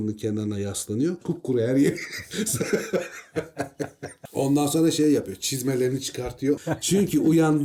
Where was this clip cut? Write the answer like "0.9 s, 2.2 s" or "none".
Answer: 1.2 s, 6.6 s